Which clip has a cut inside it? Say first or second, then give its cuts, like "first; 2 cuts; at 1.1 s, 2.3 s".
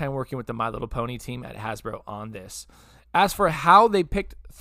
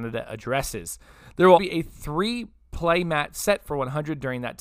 second; 1 cut; at 1.6 s